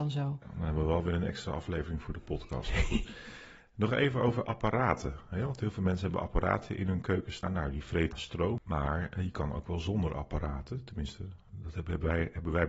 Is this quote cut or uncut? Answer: uncut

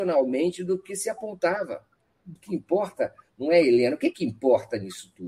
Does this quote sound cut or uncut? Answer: cut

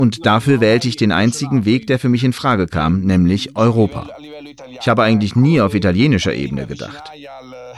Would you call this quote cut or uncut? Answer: uncut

